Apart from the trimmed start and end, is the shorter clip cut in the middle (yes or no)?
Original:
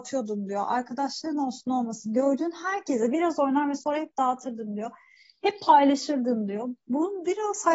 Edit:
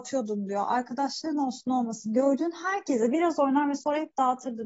no